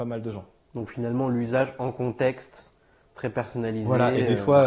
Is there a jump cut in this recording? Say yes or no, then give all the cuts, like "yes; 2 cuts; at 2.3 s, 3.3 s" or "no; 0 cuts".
no; 0 cuts